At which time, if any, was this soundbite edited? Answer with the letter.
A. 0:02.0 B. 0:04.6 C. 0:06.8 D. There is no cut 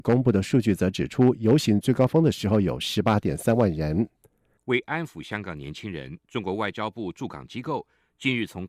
B